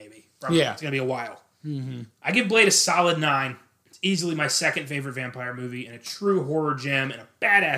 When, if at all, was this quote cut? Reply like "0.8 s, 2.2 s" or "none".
2.1 s